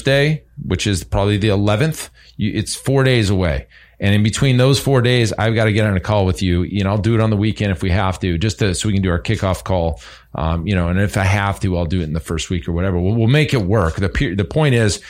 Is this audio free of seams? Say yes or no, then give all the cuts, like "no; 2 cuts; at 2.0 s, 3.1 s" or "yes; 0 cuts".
yes; 0 cuts